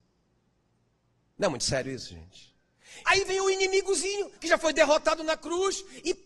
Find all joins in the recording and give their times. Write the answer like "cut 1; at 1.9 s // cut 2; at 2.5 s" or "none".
cut 1; at 3.0 s // cut 2; at 4.4 s